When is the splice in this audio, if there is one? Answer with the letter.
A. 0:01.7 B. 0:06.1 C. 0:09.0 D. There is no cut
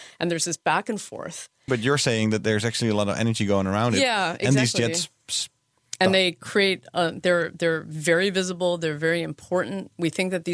A